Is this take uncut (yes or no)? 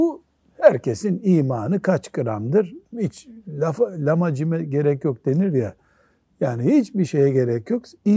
no